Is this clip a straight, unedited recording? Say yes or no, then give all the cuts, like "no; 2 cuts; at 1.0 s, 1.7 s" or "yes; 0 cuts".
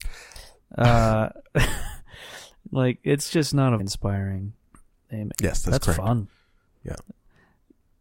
no; 2 cuts; at 3.8 s, 5.3 s